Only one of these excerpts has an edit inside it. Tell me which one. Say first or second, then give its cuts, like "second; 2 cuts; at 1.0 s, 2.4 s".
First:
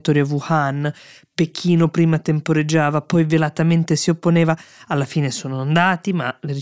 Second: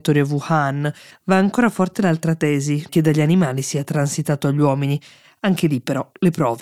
second; 2 cuts; at 1.1 s, 2.9 s